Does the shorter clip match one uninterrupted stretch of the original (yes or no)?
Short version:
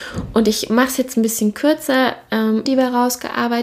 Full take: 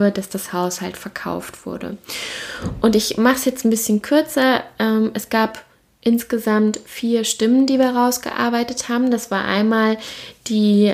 no